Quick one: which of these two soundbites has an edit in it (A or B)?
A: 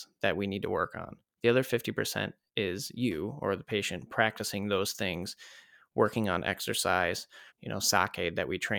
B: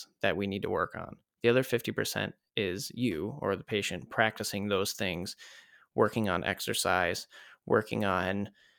A